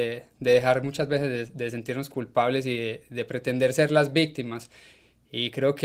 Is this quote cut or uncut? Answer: uncut